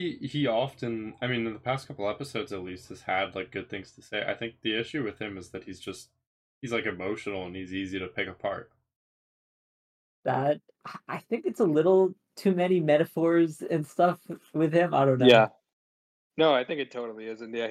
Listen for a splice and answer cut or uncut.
uncut